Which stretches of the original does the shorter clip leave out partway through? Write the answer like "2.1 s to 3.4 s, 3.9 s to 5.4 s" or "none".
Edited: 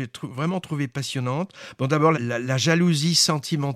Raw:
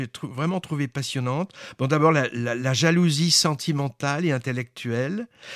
2.1 s to 2.3 s